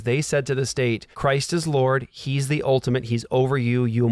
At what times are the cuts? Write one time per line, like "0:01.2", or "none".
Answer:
0:01.1